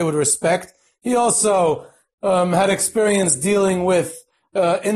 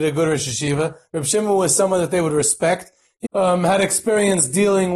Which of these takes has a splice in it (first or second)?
second